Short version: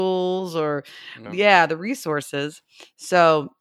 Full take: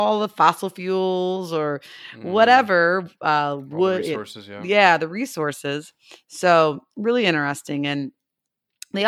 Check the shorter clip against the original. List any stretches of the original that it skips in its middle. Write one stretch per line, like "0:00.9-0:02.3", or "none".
0:02.2-0:04.6